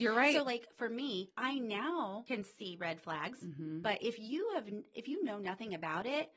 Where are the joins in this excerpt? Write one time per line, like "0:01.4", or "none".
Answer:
none